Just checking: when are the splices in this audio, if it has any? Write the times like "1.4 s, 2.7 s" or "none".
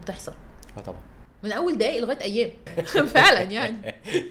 2.7 s